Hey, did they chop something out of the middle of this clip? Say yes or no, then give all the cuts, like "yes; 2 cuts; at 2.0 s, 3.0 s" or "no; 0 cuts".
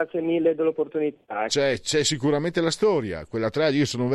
yes; 1 cut; at 1.5 s